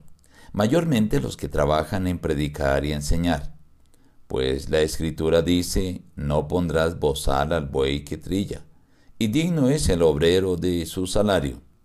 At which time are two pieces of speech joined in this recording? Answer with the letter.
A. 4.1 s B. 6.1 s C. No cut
C